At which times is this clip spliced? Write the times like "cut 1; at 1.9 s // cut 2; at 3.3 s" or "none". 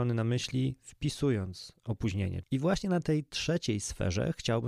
cut 1; at 2.4 s